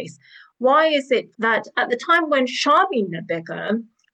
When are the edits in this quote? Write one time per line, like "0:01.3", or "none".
0:01.3